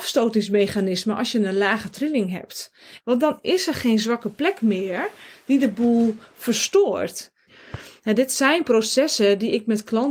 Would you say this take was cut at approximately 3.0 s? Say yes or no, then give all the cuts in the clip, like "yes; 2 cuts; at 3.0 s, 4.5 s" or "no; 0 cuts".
yes; 2 cuts; at 3.0 s, 7.5 s